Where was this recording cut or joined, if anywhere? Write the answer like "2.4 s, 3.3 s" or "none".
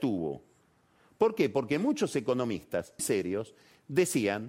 3.0 s